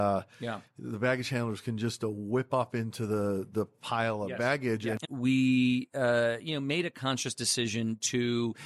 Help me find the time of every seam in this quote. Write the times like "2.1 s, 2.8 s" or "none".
5.0 s